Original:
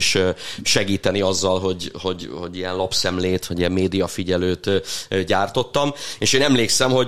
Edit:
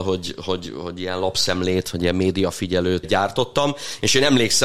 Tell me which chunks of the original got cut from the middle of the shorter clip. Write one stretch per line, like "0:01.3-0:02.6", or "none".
0:04.6-0:05.2